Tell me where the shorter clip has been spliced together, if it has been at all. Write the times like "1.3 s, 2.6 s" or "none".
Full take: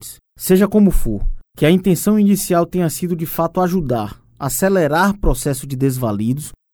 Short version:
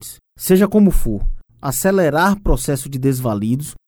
1.5 s